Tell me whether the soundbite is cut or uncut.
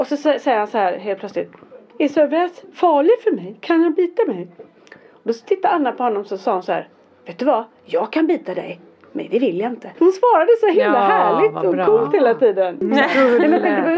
cut